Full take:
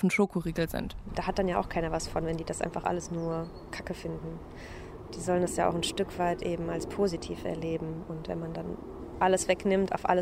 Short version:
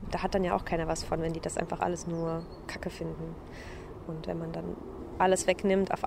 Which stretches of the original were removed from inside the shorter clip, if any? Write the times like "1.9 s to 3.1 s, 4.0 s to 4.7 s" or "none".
5.1 s to 8.0 s